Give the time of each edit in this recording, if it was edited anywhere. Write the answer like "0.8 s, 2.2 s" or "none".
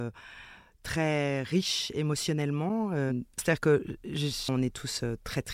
3.4 s, 4.5 s